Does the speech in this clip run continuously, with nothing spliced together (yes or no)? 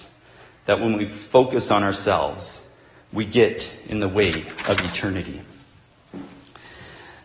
yes